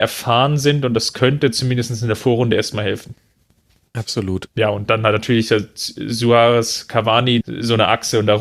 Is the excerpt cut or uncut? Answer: cut